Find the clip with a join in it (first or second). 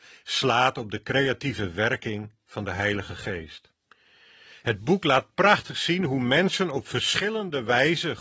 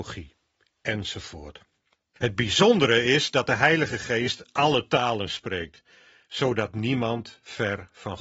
second